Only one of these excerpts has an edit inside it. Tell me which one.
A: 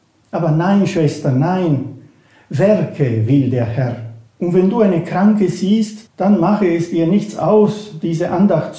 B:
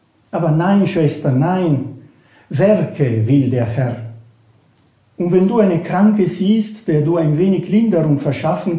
A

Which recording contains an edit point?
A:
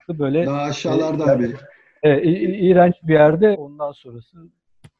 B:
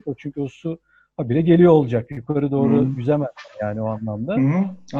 A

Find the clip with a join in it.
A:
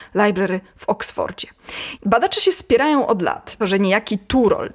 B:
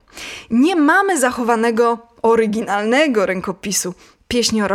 A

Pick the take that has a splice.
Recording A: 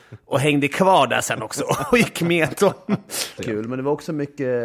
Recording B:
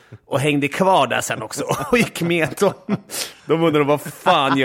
A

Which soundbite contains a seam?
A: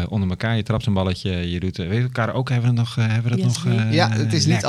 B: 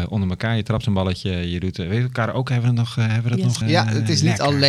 B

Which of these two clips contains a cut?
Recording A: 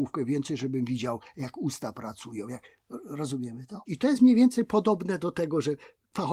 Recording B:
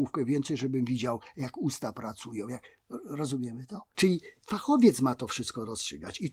A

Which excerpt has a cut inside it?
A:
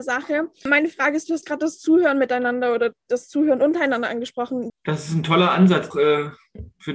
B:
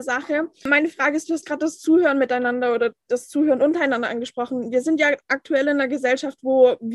A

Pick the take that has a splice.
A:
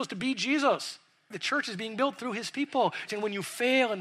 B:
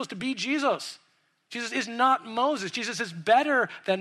A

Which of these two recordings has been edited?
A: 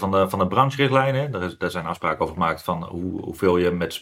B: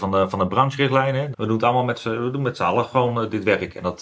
B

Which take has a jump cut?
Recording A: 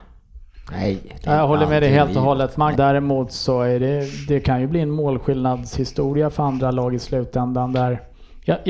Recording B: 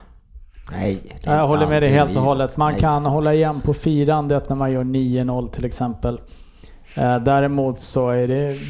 A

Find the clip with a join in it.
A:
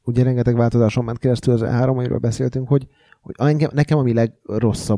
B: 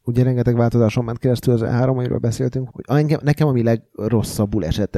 B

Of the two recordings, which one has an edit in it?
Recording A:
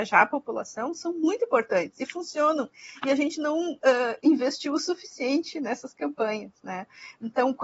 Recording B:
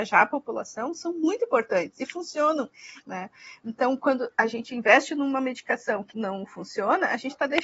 B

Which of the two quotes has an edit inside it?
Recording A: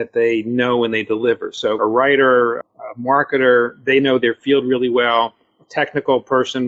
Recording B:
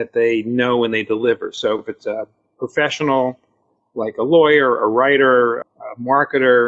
A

